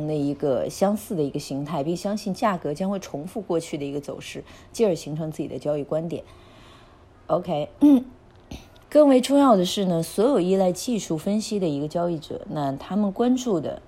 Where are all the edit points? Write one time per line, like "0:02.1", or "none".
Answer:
0:08.8